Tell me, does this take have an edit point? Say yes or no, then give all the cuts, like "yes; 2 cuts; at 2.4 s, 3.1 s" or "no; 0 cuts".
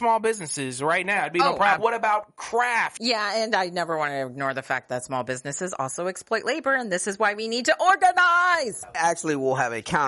yes; 3 cuts; at 1.8 s, 3.0 s, 8.9 s